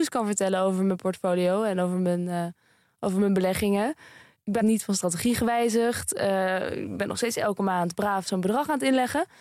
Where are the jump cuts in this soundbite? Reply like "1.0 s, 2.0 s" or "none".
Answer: none